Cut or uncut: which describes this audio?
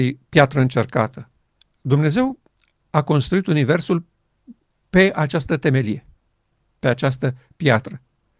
uncut